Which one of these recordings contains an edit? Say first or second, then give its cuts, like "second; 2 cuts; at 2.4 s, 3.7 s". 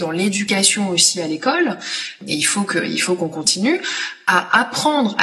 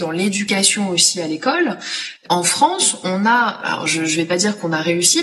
second; 1 cut; at 2.2 s